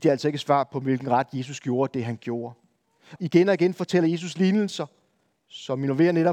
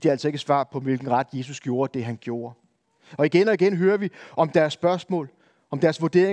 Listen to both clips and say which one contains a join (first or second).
first